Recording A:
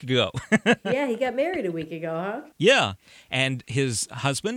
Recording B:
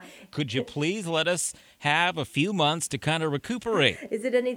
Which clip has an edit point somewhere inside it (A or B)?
A